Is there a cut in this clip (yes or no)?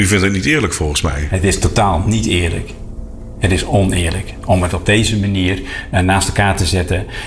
no